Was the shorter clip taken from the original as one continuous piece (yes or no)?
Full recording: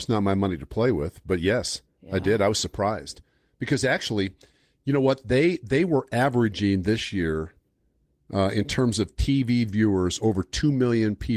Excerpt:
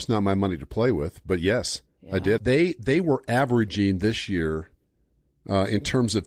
no